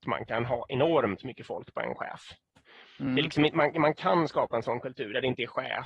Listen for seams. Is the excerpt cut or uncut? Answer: uncut